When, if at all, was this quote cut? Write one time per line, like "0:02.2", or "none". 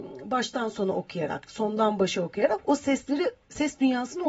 0:01.5